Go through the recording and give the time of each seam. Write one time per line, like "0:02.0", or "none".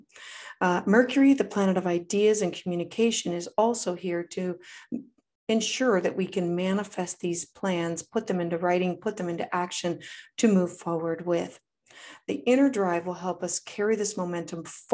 none